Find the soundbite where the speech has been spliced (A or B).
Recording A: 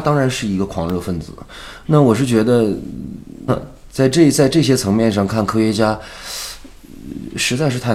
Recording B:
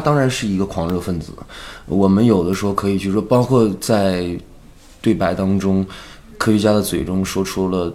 A